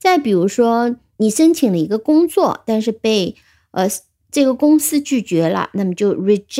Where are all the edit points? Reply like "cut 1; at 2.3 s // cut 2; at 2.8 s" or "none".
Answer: cut 1; at 1.2 s